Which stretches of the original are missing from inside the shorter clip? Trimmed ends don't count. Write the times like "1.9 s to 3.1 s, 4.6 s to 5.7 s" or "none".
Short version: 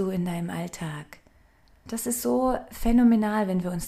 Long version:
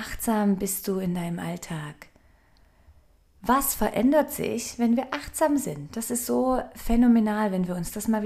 2.7 s to 5.9 s